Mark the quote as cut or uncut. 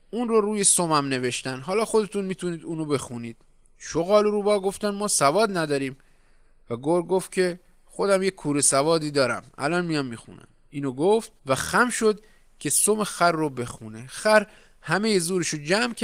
cut